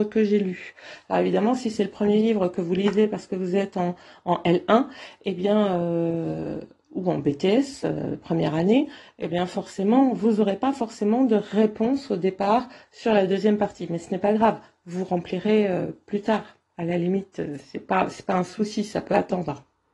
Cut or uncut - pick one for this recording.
uncut